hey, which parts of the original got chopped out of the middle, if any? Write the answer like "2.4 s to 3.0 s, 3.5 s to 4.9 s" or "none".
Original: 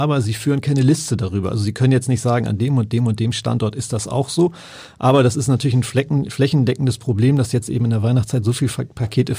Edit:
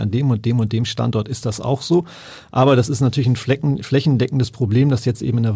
none